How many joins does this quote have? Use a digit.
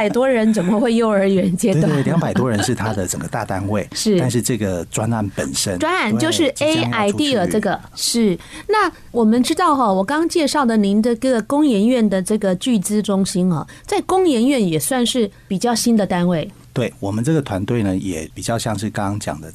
1